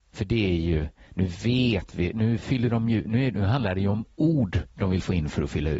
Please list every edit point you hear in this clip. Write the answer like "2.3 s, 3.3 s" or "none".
none